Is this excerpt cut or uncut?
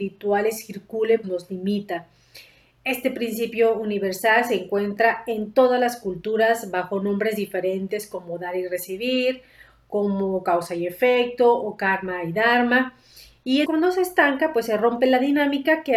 cut